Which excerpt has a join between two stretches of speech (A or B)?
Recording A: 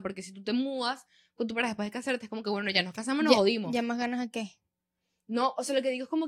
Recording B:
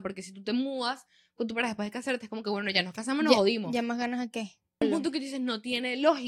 B